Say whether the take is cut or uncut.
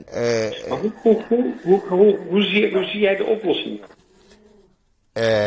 uncut